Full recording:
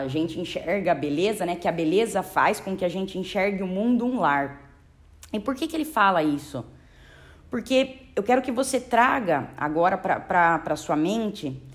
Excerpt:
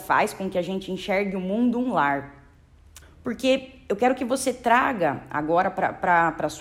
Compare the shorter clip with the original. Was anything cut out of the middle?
yes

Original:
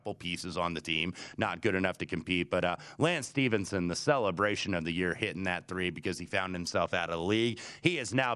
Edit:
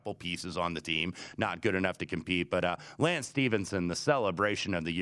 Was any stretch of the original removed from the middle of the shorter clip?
no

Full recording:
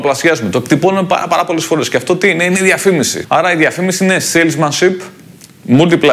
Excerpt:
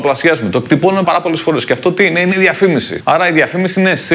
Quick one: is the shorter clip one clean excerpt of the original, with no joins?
no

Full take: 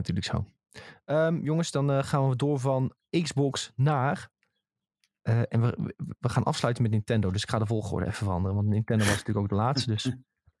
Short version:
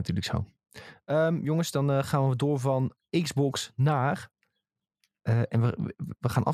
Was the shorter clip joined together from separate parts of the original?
no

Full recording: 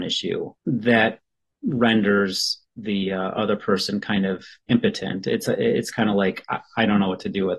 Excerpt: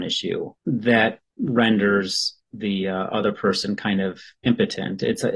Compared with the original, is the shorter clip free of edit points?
no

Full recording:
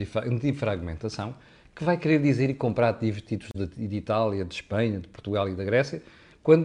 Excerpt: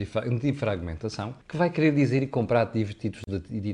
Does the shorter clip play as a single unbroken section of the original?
no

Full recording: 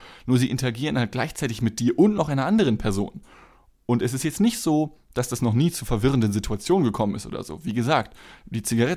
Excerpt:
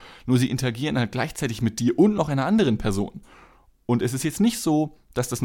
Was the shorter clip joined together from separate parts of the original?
no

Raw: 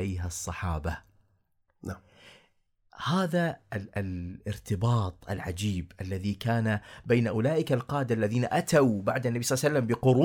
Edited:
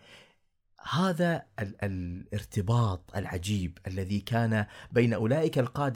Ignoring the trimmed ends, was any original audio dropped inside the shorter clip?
no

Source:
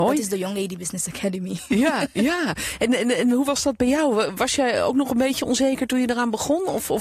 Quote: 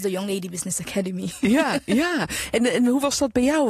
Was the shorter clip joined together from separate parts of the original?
yes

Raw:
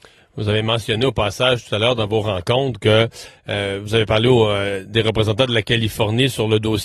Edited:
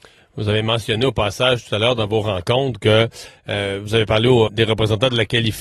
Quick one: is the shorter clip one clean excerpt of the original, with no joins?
no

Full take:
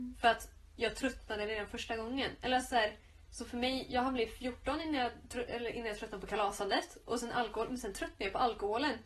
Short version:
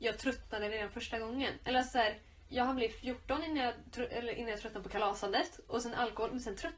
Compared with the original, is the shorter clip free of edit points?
no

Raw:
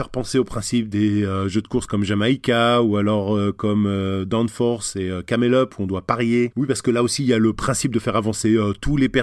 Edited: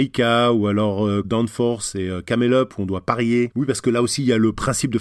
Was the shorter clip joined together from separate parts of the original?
yes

